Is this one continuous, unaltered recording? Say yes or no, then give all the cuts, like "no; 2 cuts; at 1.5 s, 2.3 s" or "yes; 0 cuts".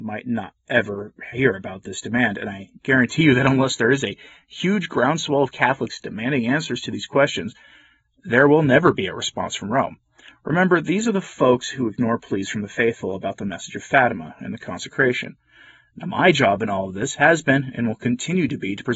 yes; 0 cuts